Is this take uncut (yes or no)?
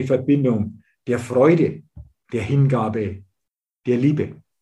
no